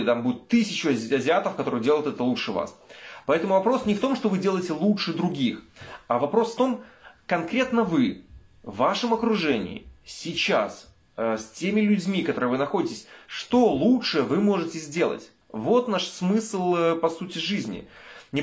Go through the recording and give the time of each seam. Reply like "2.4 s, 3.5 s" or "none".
15.4 s